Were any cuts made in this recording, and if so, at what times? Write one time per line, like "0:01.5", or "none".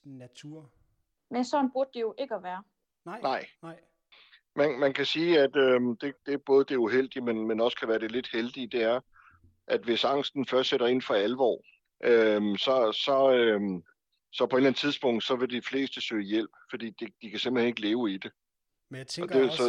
none